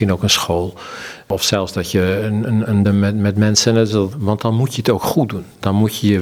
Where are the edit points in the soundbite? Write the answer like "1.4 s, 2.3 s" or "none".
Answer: 2.8 s, 4.1 s